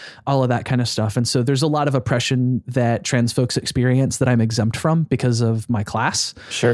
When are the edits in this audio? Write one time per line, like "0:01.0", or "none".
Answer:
none

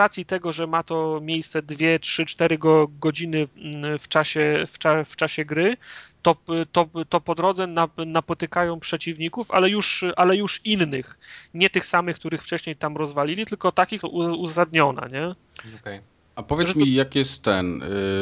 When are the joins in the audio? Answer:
0:14.0

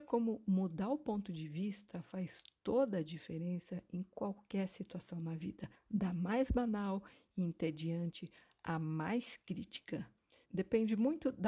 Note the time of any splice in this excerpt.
0:10.4

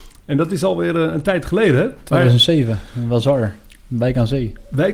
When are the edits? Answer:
none

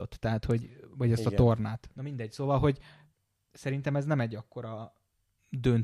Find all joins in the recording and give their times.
0:01.9

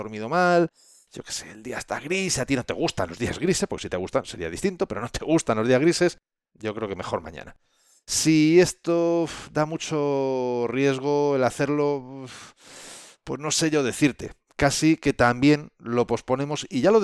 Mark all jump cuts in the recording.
0:06.5

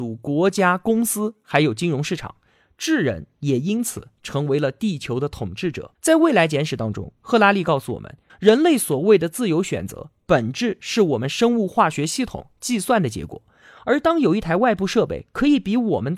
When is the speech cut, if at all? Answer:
0:05.9
0:08.3

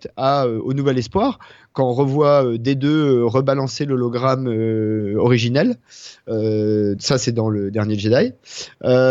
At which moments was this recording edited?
0:07.0

